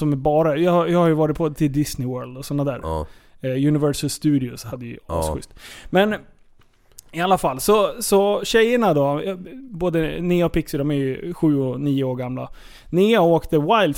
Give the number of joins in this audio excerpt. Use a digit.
0